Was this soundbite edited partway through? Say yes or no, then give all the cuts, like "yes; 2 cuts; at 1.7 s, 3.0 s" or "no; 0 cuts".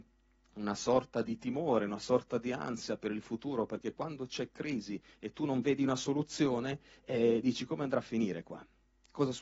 yes; 1 cut; at 1.2 s